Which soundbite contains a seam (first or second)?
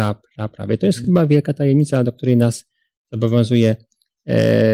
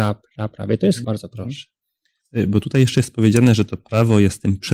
second